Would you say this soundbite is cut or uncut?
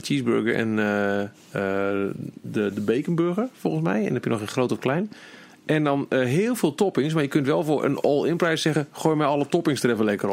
uncut